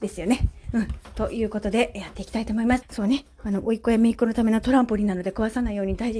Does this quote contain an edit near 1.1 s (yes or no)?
no